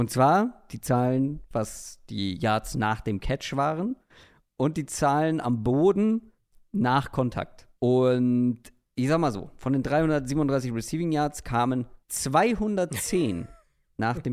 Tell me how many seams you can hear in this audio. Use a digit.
2